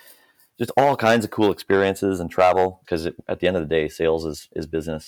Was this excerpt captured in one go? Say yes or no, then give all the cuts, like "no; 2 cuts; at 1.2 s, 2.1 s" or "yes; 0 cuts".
no; 1 cut; at 2.8 s